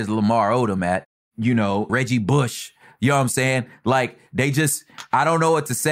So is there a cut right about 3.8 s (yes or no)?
no